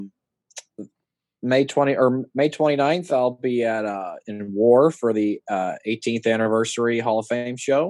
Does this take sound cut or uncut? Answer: uncut